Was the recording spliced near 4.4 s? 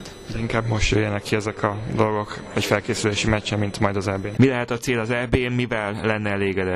yes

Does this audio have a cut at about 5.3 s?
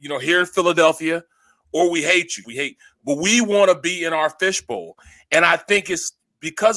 no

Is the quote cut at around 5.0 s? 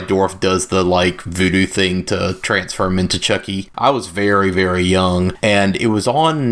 no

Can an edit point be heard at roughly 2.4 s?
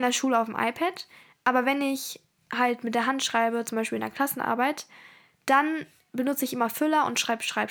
no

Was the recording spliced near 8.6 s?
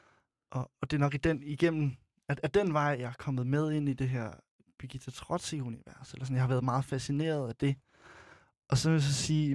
no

